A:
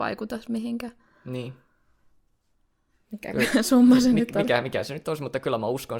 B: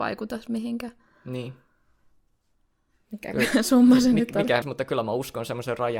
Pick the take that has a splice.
B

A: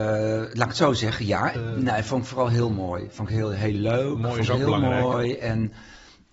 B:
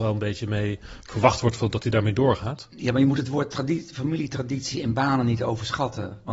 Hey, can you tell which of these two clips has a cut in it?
A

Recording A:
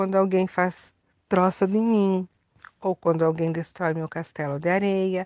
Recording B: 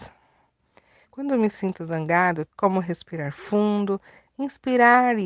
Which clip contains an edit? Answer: B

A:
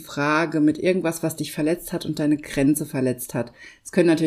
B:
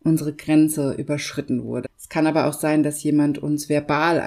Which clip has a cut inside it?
B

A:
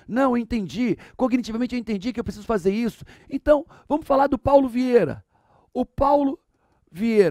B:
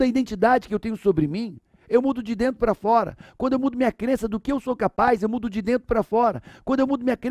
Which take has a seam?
A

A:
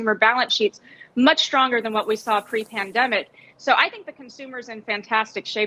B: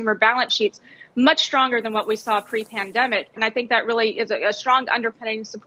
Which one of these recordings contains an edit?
B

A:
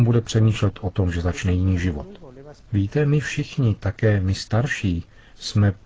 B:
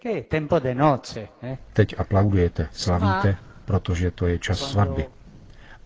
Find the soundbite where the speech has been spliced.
A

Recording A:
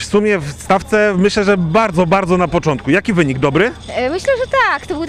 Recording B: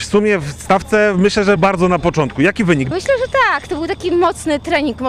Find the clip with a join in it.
B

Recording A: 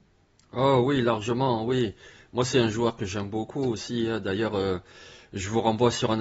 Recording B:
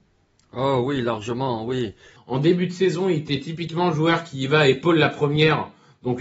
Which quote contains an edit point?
B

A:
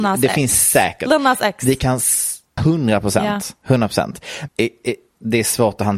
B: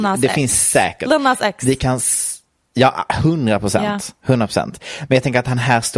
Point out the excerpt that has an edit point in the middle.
A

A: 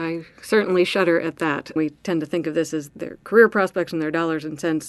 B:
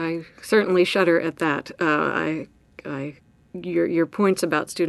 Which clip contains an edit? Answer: A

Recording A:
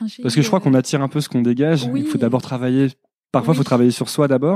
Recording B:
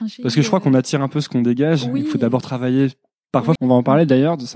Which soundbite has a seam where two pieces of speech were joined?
B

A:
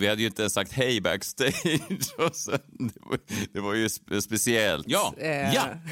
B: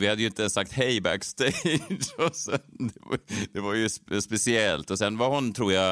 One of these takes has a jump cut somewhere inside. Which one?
A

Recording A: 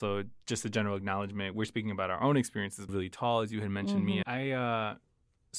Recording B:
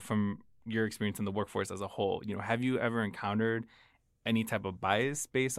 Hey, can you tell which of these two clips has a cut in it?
A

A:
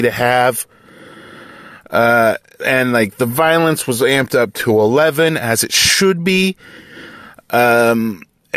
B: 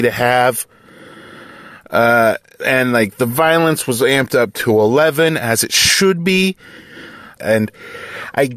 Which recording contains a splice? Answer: B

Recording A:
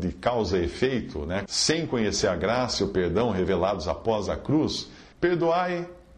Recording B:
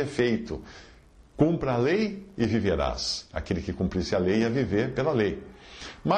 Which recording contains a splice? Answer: A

